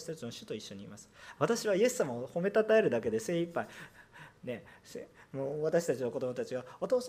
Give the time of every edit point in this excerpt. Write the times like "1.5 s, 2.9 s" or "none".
1.4 s